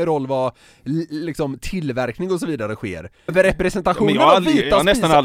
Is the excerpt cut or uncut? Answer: cut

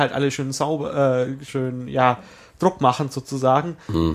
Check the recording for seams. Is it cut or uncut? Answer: cut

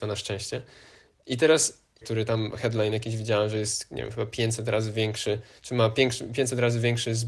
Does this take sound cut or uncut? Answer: cut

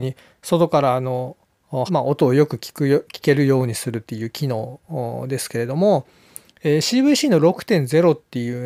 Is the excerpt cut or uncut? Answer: cut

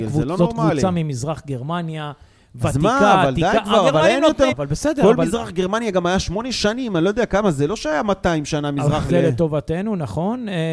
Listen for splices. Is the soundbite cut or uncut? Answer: cut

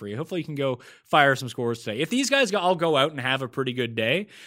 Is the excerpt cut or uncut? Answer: uncut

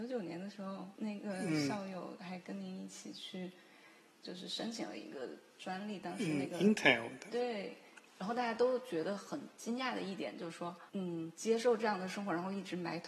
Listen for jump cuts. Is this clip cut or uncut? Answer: cut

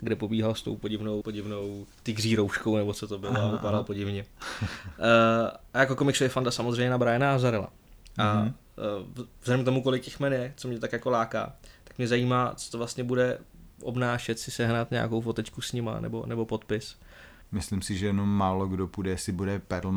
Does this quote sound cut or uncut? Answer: cut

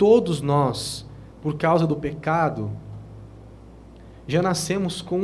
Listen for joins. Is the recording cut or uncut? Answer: cut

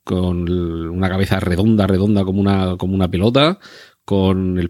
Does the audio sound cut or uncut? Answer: uncut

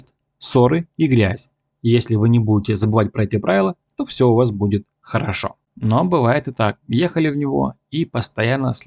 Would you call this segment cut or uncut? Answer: cut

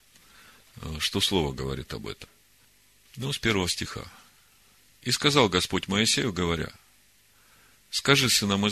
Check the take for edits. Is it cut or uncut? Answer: uncut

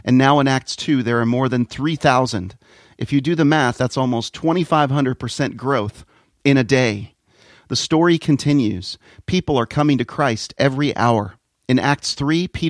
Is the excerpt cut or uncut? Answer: uncut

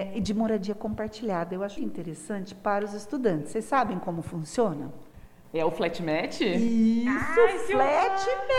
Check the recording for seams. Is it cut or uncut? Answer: cut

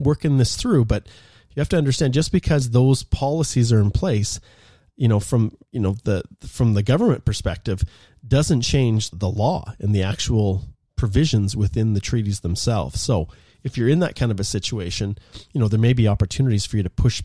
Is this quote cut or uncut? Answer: cut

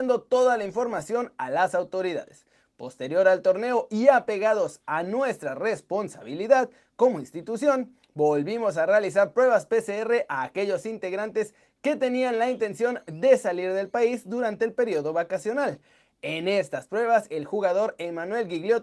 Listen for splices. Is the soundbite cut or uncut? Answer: uncut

